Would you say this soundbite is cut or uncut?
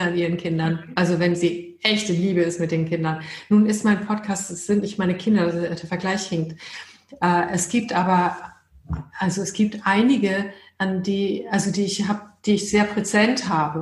uncut